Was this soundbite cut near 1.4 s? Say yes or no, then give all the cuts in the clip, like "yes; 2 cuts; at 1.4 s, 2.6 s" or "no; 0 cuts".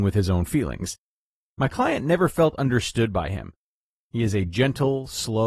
yes; 1 cut; at 1.4 s